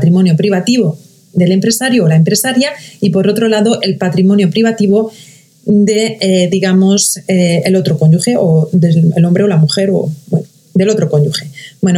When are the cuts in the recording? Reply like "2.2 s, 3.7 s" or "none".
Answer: none